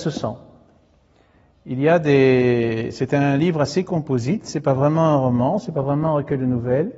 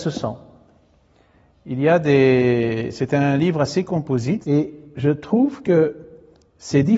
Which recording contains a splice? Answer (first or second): second